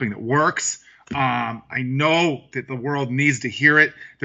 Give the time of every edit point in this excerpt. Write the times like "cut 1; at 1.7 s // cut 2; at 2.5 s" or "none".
none